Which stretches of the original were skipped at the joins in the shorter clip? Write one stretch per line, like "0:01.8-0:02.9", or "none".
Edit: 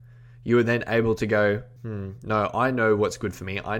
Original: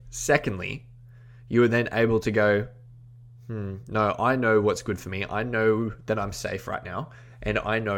0:02.8-0:03.4

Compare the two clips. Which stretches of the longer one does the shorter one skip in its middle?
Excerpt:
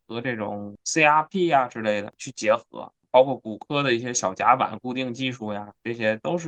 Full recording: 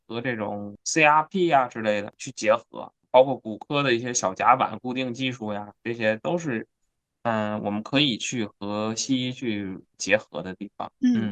none

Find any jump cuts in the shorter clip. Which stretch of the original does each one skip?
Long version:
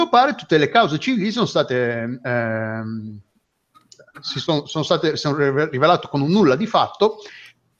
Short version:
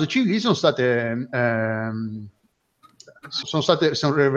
0:04.3-0:04.6

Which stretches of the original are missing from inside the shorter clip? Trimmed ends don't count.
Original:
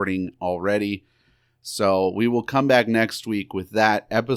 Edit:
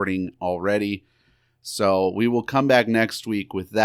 none

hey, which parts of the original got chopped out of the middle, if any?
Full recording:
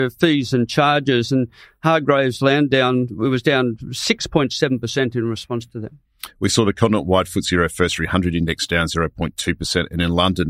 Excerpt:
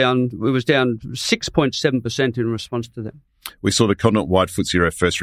none

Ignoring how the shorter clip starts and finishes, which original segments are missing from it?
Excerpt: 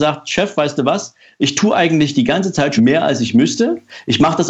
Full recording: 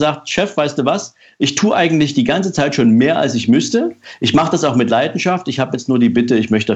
0:02.8-0:02.9

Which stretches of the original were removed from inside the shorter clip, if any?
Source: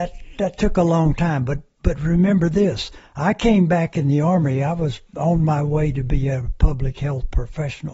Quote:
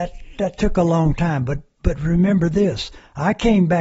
none

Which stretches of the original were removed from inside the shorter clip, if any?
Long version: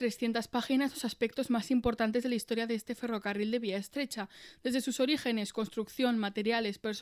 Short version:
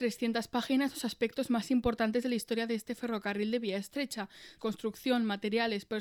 0:04.6-0:05.5

